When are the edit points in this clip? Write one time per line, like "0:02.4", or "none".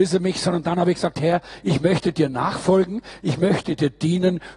none